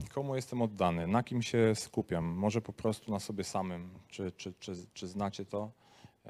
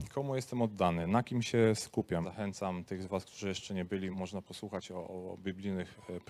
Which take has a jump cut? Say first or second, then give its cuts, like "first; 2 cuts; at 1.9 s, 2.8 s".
second; 2 cuts; at 2.2 s, 4.1 s